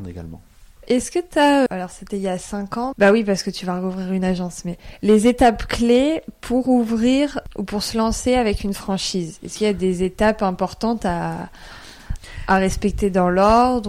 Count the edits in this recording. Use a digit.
2